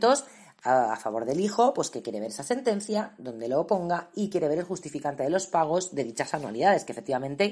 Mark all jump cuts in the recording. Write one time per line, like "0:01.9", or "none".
none